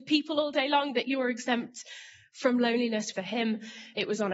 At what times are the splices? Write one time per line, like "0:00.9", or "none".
0:03.1